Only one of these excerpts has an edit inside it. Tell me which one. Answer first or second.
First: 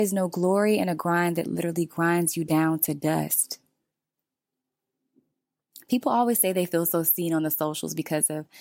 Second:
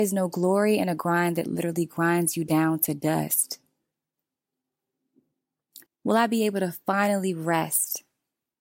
second